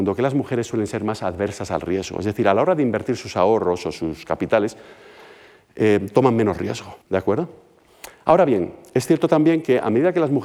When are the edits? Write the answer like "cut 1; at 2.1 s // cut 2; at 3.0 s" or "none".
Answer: cut 1; at 7.0 s